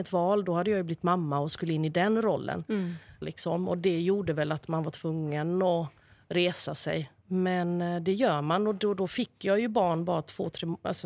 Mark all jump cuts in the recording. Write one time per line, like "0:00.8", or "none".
0:03.2
0:07.2

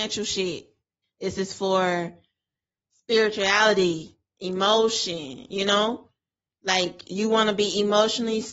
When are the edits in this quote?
0:01.0

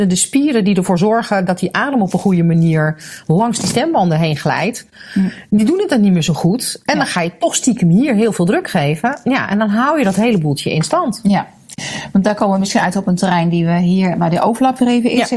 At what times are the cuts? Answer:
none

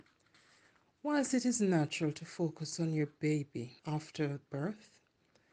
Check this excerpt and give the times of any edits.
0:03.8

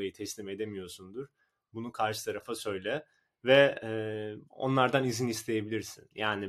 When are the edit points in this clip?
0:04.5

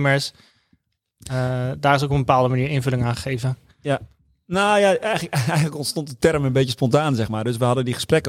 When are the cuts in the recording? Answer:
none

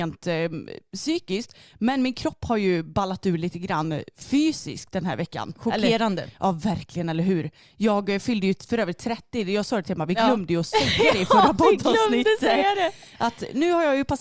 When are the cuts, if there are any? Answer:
none

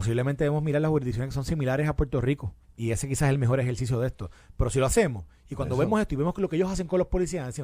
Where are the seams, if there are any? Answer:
0:02.6

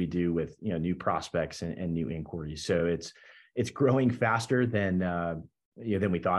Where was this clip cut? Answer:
none

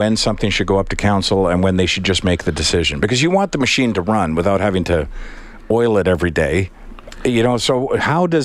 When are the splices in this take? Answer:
none

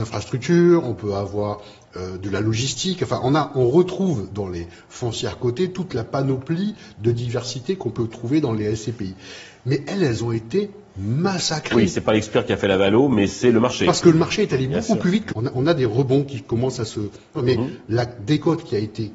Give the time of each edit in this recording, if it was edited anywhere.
0:15.3
0:17.4

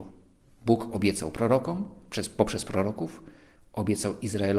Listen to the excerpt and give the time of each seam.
none

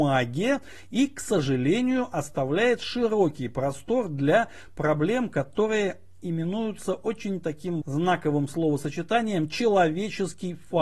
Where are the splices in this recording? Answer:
0:07.8

